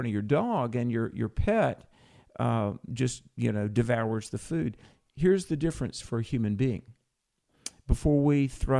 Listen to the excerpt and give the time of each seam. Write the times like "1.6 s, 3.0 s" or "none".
none